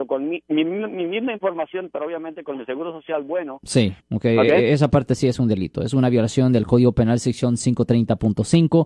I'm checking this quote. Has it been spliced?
yes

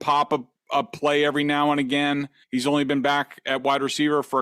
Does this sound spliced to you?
yes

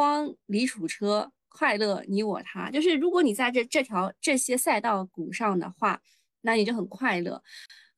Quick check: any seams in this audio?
no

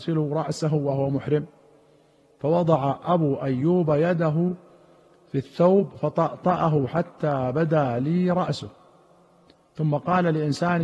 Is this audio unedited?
yes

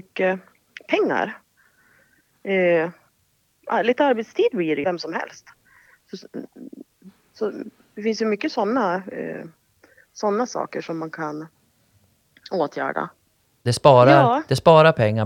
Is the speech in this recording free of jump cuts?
no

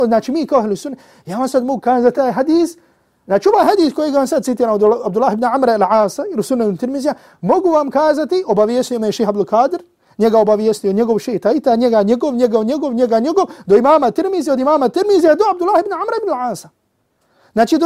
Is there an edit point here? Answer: yes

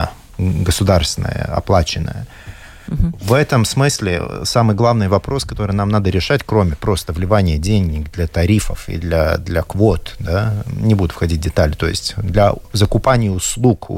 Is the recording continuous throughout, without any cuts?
yes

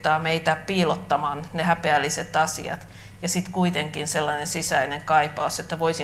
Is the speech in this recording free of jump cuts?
yes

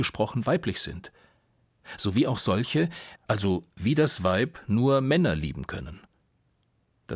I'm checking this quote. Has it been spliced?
yes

